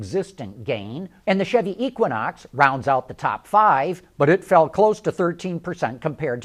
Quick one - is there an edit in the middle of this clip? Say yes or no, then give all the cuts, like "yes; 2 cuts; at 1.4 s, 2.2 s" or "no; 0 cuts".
yes; 1 cut; at 1.2 s